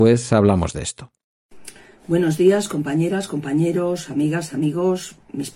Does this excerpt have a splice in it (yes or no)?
no